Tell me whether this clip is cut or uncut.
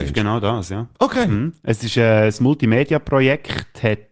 uncut